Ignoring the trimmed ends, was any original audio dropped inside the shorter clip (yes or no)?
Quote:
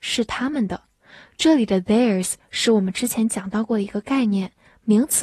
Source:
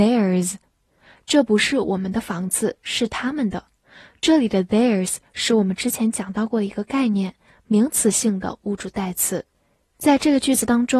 no